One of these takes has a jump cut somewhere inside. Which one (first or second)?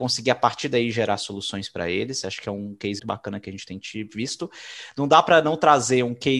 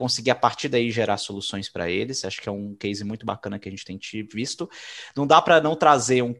first